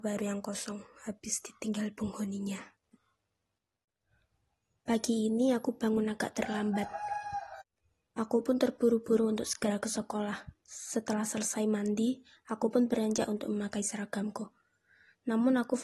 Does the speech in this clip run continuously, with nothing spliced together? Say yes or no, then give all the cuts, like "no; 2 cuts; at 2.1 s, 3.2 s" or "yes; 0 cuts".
yes; 0 cuts